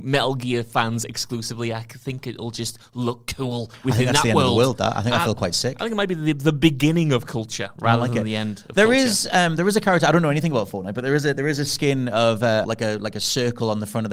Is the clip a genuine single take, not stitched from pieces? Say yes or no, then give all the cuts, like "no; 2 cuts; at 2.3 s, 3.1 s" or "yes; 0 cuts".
no; 1 cut; at 12.6 s